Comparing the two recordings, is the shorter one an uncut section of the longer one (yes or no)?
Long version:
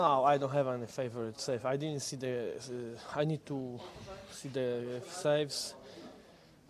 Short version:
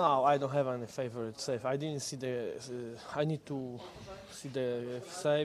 yes